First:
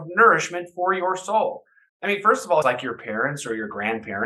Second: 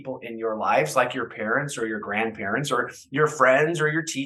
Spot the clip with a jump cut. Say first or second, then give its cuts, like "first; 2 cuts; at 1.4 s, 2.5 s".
first; 1 cut; at 2.6 s